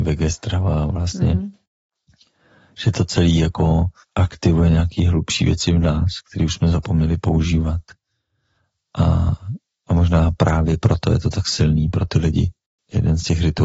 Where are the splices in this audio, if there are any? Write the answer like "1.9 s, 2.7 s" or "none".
none